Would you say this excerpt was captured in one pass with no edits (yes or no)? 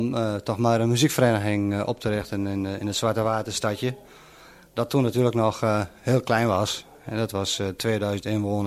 yes